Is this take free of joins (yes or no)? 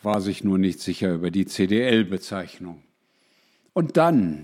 yes